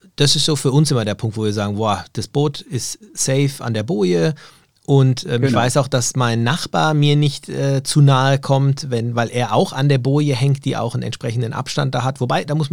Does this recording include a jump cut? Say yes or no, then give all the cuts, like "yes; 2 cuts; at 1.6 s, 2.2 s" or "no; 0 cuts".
no; 0 cuts